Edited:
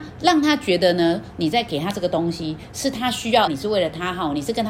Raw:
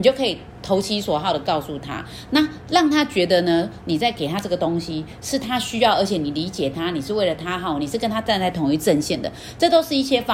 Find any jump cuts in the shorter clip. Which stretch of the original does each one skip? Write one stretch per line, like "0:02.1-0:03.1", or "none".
0:06.0-0:06.9